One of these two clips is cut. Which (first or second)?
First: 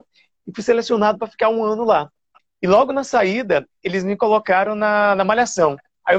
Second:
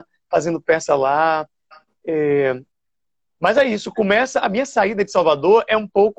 first